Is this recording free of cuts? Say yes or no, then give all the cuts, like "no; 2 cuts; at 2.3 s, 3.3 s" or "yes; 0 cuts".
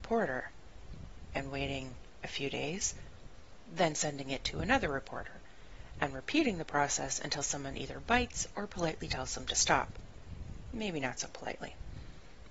yes; 0 cuts